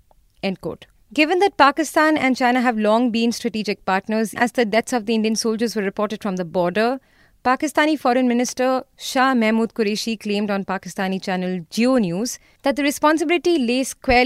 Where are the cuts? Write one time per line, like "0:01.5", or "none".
0:04.4